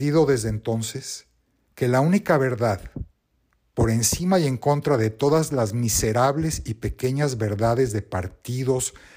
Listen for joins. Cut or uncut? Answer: uncut